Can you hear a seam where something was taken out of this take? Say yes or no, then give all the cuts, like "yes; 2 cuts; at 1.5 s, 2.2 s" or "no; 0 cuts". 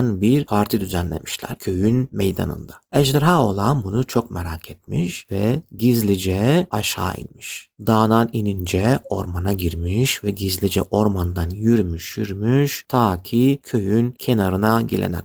yes; 1 cut; at 12.2 s